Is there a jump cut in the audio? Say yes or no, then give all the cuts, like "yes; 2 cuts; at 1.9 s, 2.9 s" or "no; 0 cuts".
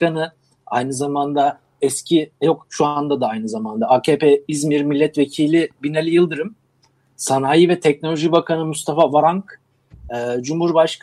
no; 0 cuts